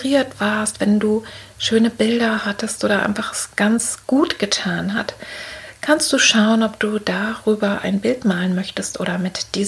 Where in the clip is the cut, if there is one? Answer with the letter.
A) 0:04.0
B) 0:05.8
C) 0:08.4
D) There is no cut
A